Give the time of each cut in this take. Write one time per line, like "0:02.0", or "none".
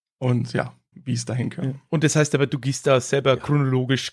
0:00.9